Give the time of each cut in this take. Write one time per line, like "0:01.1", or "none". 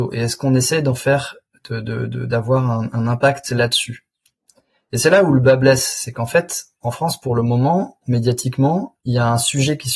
none